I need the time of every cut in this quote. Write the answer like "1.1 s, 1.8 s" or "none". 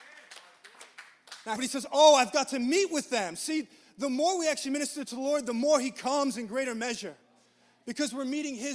1.6 s